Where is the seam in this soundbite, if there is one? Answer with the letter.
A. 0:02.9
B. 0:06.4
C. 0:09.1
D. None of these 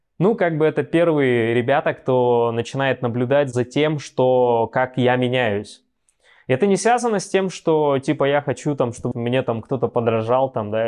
C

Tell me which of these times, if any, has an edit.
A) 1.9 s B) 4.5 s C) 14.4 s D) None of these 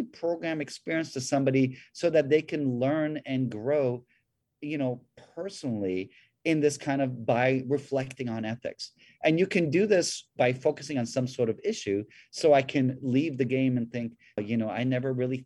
C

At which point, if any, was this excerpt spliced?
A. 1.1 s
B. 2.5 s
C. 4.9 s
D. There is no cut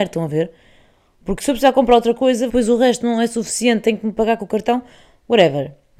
B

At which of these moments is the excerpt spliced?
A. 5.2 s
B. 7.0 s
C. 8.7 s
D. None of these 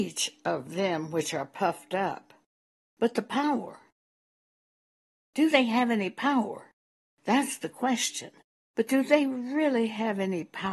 C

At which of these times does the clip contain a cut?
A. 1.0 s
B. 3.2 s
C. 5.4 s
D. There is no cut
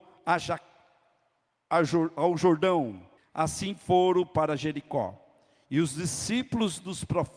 B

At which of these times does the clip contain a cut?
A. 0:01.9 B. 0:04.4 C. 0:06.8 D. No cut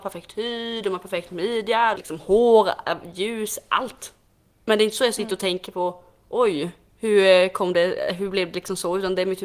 A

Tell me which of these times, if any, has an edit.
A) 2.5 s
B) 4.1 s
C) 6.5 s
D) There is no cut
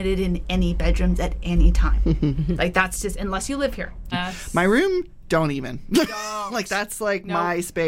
B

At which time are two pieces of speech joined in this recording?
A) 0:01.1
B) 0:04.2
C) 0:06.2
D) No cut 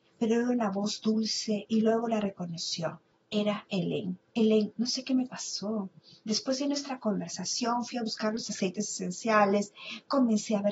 B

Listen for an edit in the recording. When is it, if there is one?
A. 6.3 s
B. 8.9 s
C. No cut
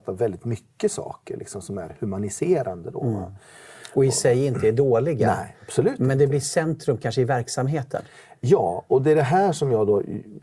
B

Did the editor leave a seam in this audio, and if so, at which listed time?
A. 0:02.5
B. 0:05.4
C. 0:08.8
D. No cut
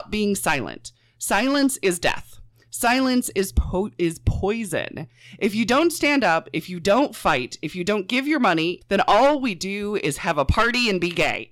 C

